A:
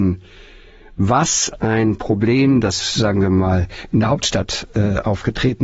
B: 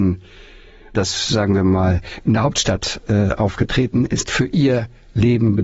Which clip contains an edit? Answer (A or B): B